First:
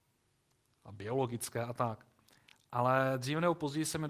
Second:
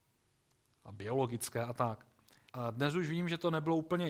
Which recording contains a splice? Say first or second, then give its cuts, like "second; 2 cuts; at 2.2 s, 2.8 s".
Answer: second; 1 cut; at 2.5 s